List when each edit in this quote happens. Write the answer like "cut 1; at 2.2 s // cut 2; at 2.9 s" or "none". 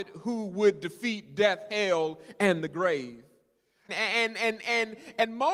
cut 1; at 3.9 s